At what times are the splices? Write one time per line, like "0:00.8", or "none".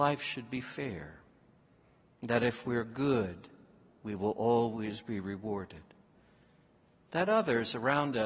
none